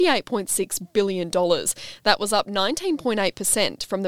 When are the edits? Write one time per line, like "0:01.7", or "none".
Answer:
none